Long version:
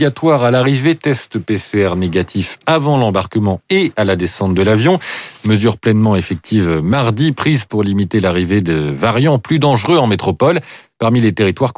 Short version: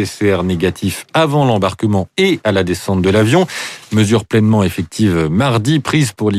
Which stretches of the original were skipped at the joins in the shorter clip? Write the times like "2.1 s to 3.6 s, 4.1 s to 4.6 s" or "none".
none